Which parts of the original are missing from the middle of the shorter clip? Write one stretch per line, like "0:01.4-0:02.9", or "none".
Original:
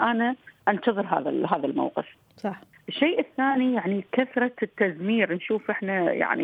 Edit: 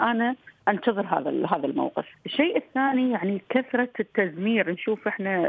0:02.1-0:02.8